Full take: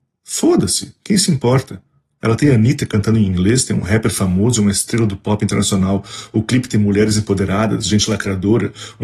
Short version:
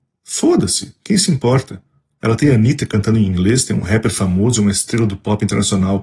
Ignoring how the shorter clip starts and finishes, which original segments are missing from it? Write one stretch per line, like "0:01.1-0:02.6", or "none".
none